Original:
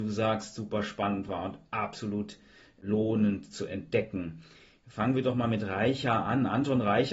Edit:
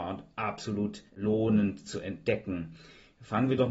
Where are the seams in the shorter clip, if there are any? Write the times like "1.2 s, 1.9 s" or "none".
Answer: 1.1 s